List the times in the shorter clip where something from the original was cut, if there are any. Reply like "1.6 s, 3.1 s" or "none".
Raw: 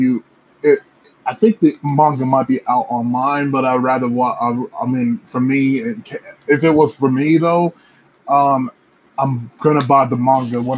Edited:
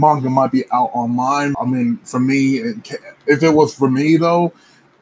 1.5 s

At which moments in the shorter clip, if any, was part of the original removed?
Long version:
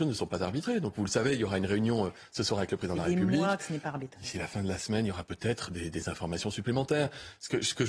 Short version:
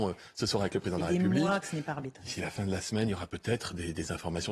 none

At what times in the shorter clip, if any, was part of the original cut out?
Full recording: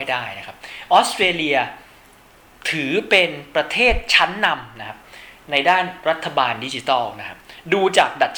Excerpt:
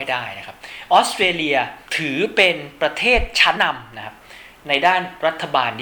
1.9 s, 3.5 s

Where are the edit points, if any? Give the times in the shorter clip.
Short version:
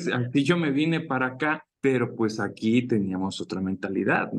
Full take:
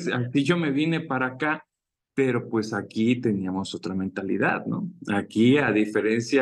1.7 s

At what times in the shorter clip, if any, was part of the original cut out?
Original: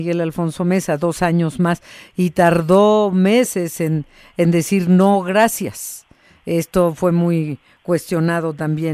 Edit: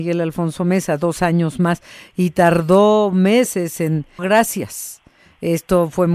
4.2 s

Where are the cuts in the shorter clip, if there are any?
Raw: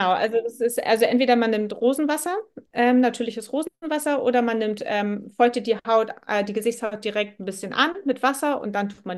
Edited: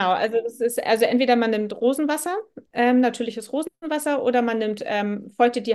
none

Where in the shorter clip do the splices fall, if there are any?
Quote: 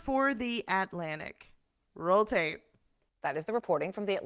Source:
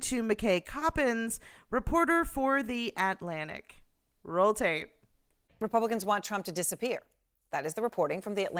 3.1 s

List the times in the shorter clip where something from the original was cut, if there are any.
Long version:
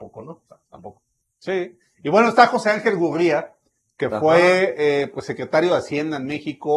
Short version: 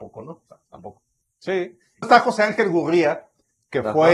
2.0 s

